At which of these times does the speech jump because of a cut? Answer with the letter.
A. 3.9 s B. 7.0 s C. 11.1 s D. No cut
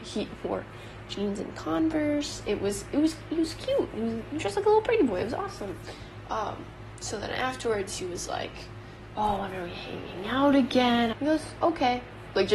C